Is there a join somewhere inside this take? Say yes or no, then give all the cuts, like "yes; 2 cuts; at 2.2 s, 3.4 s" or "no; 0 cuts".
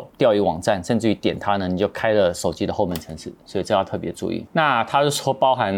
yes; 1 cut; at 4.5 s